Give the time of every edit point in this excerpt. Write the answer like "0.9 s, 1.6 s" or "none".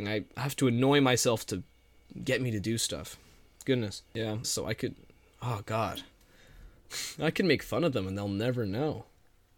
4.4 s